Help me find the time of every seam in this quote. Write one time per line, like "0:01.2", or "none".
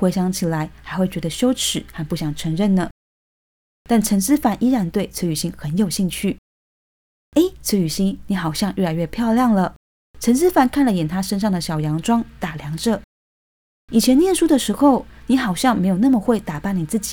none